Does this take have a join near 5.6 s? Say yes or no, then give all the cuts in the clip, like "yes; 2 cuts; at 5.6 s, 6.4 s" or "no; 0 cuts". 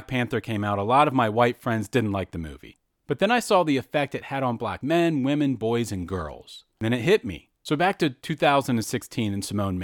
no; 2 cuts; at 2.9 s, 7.6 s